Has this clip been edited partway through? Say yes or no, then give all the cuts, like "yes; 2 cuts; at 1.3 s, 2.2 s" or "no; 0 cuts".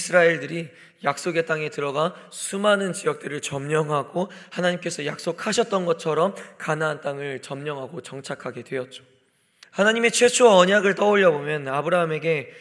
yes; 1 cut; at 9.6 s